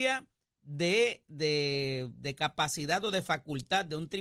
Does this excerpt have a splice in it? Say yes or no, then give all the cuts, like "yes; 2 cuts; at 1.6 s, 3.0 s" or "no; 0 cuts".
yes; 1 cut; at 1.3 s